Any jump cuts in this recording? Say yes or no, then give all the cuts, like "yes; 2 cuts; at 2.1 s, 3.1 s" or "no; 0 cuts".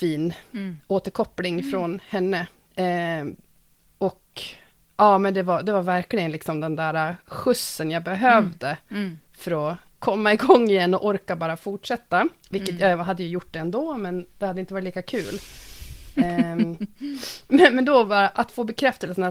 no; 0 cuts